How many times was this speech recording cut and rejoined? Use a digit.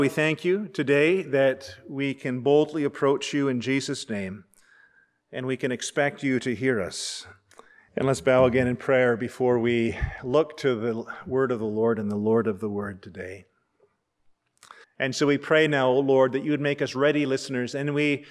2